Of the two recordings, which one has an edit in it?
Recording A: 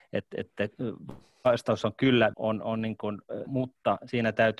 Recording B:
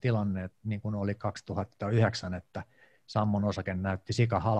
A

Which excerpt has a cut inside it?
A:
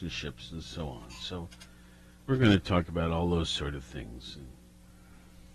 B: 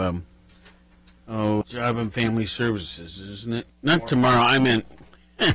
B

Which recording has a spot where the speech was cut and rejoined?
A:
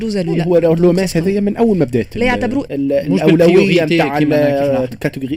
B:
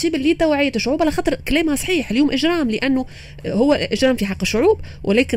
A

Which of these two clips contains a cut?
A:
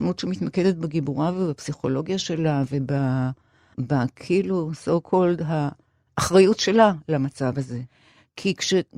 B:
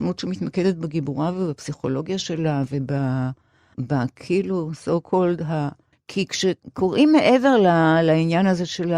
B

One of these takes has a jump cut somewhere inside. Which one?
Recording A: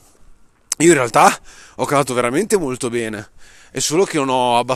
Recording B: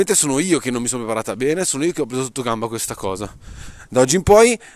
B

